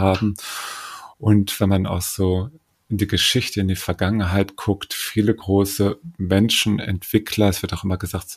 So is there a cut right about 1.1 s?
no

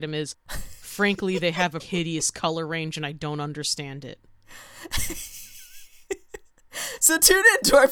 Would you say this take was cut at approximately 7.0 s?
no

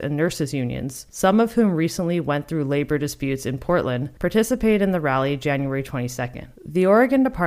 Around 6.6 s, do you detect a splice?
yes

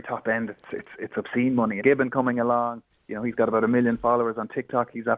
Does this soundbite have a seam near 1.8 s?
yes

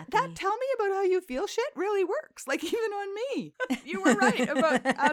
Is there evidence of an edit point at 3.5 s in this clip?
yes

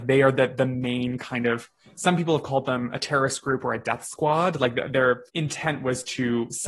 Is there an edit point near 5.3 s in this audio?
yes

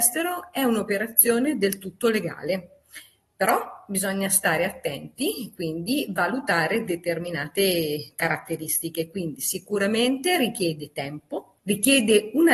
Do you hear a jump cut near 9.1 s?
no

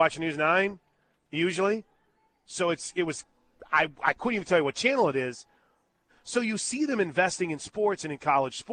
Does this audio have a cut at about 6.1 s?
yes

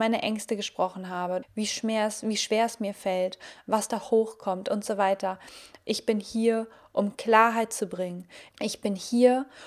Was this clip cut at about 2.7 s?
no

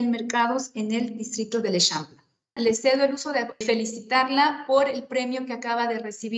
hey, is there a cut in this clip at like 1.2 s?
no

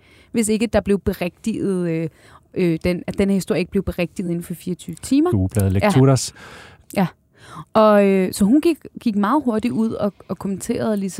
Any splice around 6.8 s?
yes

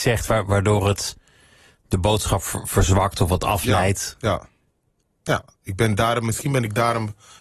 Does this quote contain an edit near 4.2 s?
no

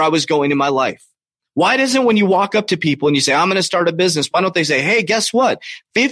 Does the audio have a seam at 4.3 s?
no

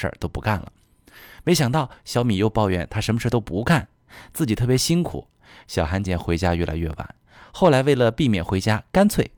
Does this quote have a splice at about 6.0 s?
yes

